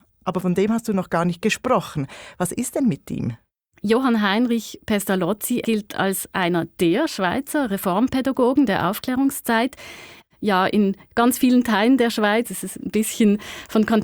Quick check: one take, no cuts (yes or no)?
no